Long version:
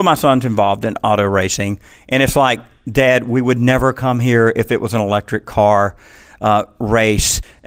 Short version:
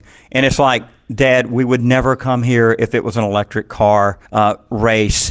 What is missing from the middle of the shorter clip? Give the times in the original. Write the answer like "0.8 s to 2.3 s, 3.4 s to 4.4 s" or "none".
6.0 s to 6.3 s